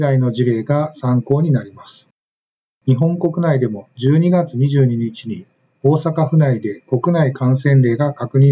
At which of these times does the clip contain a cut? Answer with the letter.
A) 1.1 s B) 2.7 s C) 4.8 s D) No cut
B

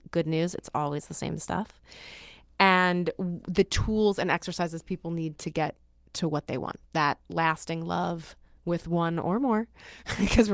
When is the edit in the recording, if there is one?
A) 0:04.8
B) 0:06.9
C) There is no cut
B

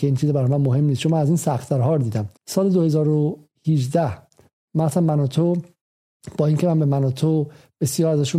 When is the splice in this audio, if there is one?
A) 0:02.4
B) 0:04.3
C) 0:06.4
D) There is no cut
A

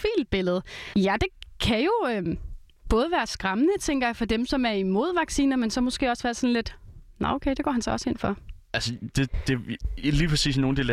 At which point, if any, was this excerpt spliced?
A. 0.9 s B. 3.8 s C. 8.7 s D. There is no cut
A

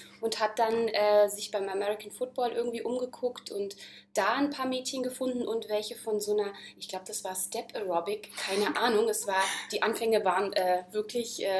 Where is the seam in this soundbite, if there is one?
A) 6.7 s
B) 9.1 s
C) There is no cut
C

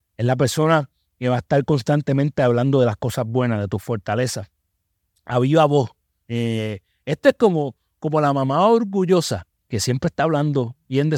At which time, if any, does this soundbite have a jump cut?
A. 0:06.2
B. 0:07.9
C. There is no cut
A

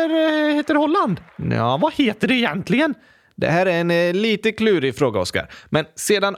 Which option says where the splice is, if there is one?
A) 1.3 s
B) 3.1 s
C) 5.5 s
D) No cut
A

